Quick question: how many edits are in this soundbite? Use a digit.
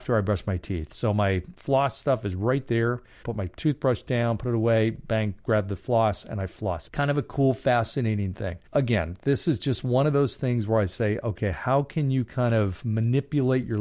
3